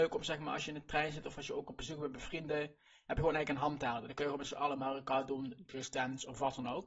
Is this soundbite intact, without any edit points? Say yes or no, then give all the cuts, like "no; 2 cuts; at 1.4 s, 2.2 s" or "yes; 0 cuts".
yes; 0 cuts